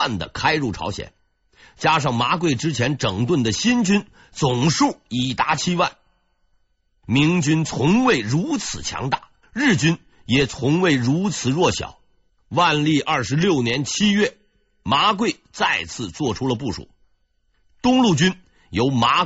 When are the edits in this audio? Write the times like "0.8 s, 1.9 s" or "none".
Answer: 12.3 s

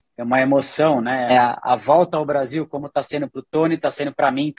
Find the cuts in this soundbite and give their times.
1.3 s

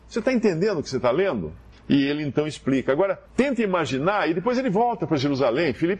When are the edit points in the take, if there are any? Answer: 1.7 s, 3.3 s

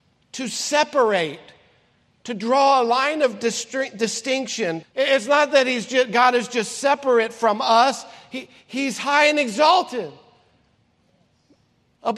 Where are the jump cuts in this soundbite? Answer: 4.8 s

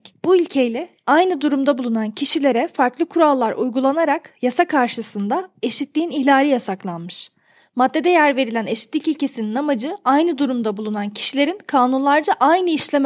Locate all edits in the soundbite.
7.6 s

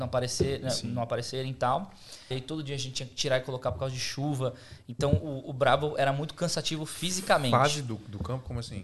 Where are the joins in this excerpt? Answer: 2.3 s

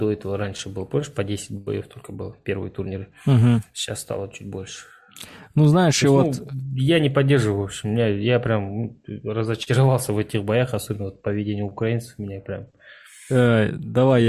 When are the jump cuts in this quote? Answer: none

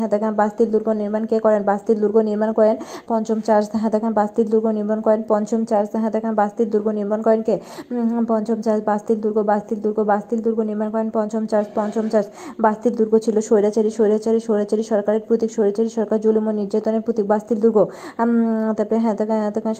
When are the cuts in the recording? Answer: 3.1 s, 15.6 s

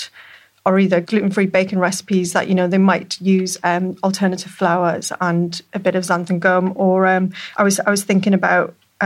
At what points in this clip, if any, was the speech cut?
none

